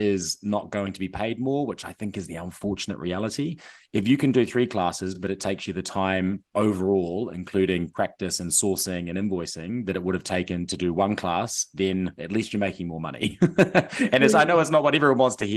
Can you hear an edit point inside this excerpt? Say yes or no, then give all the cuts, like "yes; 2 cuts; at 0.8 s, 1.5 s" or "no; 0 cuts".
no; 0 cuts